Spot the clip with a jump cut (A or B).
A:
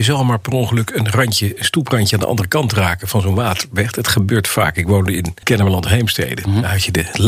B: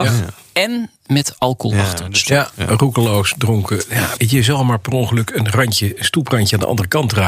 B